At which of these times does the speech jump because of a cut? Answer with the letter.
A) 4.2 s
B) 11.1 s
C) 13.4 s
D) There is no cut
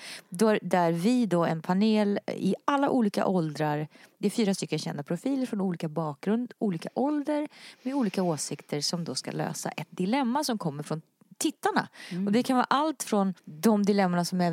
C